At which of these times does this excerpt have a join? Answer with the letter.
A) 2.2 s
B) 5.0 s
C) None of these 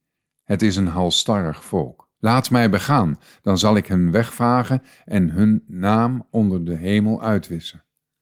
A